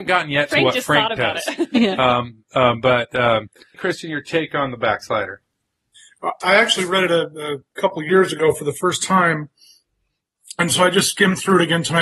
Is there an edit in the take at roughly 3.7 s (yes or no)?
yes